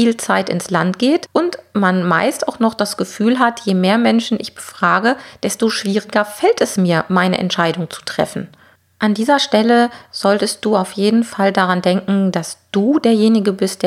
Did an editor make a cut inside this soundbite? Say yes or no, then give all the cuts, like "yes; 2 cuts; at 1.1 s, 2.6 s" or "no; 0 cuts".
no; 0 cuts